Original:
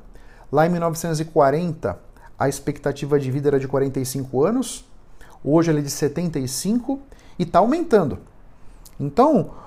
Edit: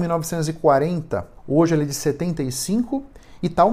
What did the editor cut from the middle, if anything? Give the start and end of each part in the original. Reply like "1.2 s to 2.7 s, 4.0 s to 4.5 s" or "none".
2.1 s to 5.3 s